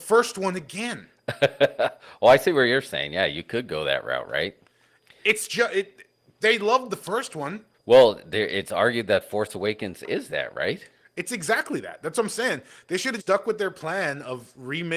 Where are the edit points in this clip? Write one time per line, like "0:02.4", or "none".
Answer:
0:07.7
0:13.2

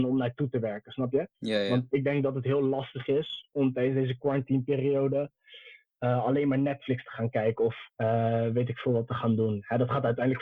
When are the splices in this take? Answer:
0:01.3
0:07.9

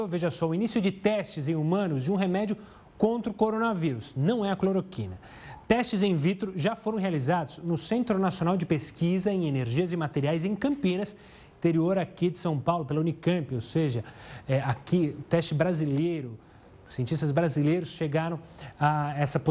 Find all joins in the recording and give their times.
none

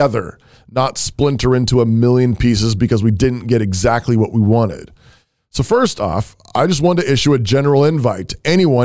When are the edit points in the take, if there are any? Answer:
none

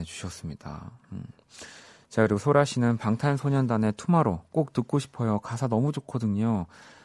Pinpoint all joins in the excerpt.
none

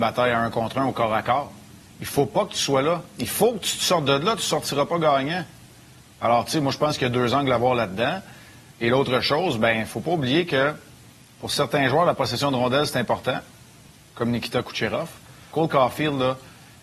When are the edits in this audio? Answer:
0:15.5

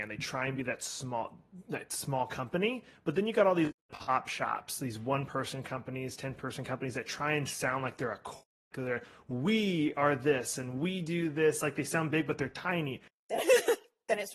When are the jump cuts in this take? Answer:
0:08.7
0:13.1

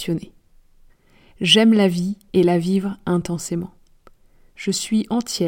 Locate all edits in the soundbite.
0:04.4

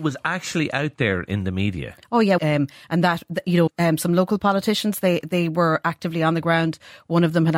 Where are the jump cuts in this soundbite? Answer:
0:02.4
0:03.7

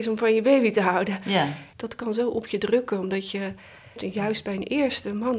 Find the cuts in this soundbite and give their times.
0:01.7
0:04.0

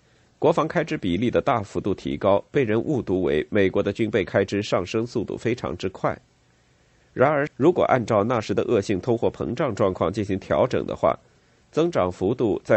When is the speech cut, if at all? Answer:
0:07.5

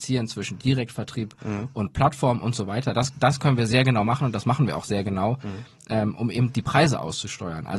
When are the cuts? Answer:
none

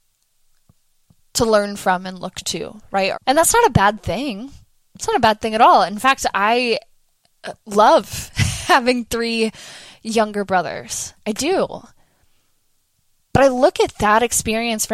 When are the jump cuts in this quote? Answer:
0:03.1

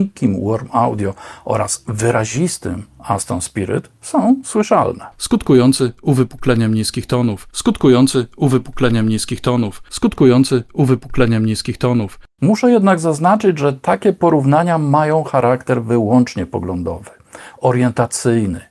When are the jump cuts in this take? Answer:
0:07.5

